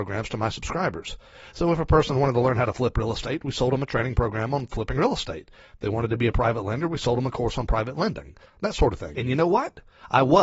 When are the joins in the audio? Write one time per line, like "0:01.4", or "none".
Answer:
none